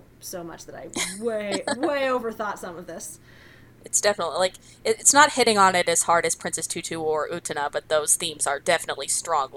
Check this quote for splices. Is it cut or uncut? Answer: cut